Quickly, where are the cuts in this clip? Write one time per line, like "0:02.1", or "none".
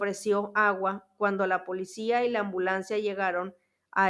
none